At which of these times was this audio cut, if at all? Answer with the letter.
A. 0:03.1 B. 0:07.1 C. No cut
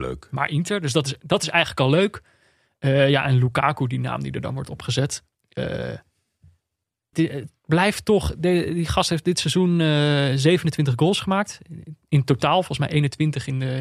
B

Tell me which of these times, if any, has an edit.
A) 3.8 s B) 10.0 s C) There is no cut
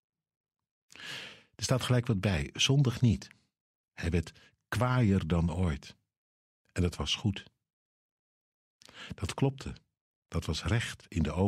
A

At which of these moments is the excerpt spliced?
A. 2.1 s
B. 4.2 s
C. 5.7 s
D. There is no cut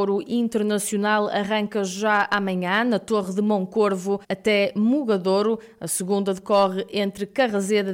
B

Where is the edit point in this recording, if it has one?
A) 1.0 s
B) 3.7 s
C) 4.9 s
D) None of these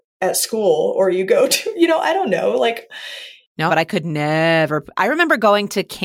B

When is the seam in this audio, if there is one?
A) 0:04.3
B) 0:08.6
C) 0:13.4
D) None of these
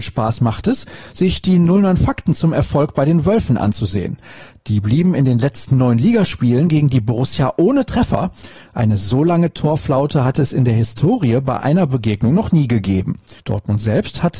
C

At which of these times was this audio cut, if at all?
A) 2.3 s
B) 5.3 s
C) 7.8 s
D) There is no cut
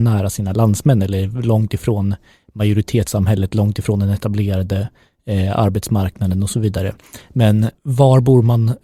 C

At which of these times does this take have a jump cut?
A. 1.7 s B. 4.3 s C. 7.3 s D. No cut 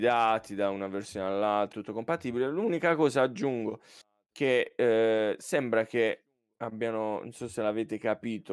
A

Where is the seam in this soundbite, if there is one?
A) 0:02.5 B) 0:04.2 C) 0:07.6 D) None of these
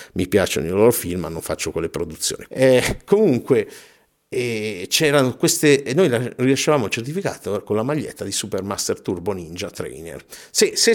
A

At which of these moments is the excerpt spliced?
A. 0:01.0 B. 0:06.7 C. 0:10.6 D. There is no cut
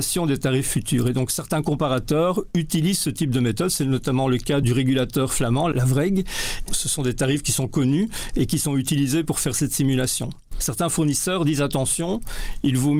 B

